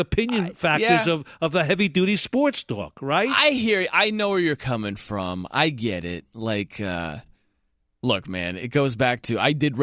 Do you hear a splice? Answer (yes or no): no